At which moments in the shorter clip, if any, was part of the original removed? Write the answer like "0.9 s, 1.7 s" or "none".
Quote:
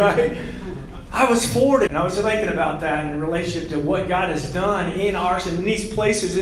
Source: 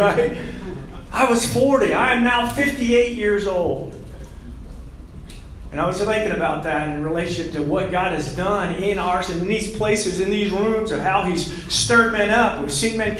1.9 s